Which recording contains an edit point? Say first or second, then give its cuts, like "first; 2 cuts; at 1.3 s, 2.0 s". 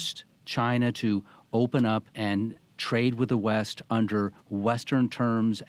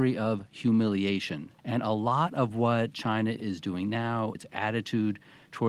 second; 2 cuts; at 1.6 s, 4.3 s